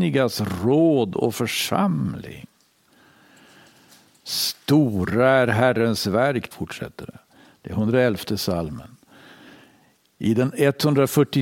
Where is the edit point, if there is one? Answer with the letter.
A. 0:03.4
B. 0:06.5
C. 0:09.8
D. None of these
B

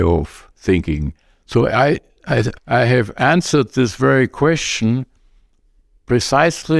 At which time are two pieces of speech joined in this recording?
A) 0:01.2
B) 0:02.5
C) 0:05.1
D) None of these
B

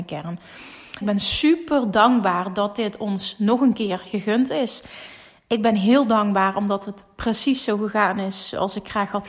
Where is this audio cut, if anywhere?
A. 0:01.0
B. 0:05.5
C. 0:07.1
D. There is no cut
A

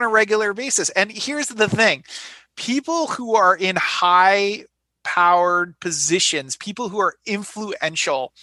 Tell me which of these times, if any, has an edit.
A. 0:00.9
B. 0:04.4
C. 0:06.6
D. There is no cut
D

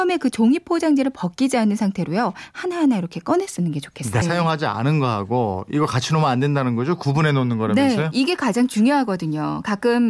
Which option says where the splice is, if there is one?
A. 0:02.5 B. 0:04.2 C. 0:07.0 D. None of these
B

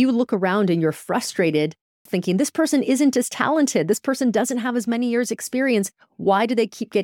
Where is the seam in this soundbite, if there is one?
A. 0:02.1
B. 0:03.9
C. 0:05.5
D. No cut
A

